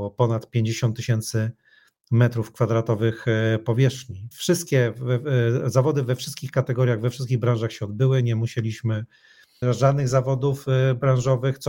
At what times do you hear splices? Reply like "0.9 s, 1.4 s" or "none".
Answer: 4.3 s, 9.6 s